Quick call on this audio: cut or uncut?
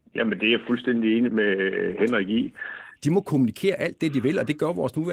cut